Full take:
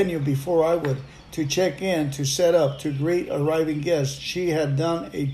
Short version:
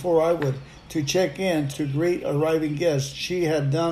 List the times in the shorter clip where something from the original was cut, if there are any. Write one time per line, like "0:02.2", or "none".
0:01.7